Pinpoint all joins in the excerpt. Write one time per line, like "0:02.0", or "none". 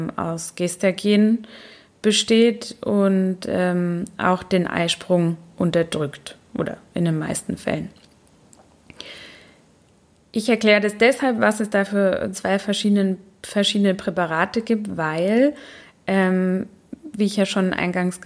none